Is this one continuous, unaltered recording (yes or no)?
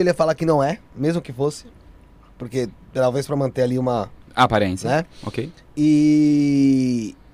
yes